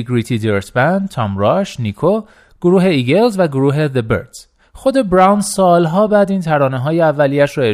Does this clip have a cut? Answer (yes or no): no